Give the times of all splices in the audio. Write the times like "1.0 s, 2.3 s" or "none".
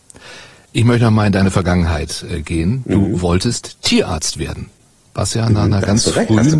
none